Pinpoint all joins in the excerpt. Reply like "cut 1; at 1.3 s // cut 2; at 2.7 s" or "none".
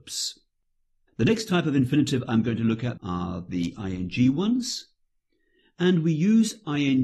cut 1; at 3.0 s